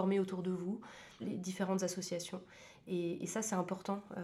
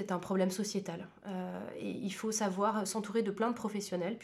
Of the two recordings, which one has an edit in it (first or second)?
first